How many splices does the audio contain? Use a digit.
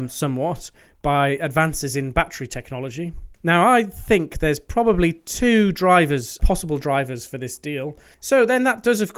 2